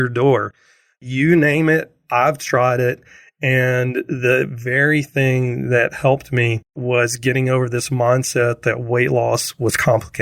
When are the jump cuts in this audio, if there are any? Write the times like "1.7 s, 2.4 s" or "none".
none